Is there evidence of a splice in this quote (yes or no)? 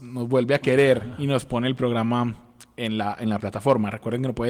no